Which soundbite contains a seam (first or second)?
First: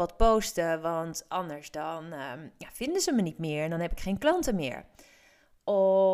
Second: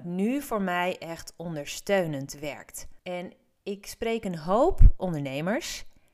second